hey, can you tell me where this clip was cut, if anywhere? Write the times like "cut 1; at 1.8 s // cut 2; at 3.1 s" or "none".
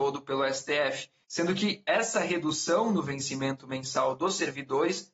cut 1; at 1.2 s